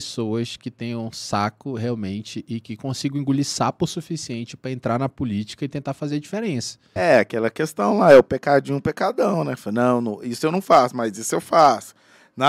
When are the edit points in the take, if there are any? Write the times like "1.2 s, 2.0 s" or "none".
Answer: 7.0 s